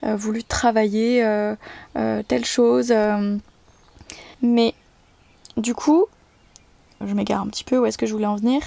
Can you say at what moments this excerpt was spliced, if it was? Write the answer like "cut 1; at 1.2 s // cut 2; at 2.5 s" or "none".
cut 1; at 4.3 s // cut 2; at 7.0 s